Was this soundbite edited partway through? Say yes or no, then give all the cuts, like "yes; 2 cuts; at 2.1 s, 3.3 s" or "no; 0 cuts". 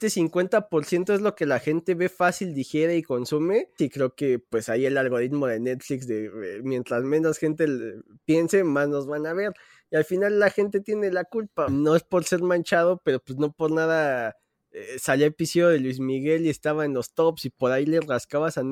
yes; 2 cuts; at 3.8 s, 11.7 s